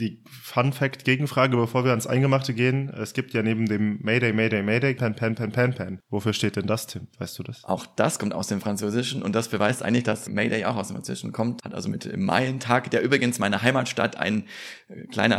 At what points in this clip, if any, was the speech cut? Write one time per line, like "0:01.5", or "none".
0:05.0
0:10.3
0:11.6